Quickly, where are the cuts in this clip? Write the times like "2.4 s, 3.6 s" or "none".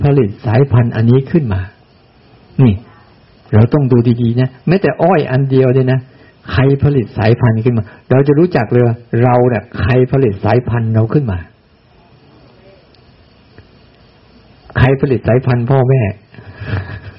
none